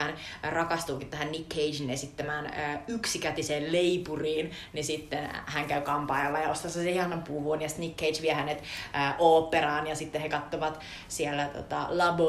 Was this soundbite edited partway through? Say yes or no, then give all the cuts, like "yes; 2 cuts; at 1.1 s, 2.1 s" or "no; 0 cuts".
no; 0 cuts